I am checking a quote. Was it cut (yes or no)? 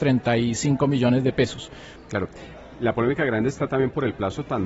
yes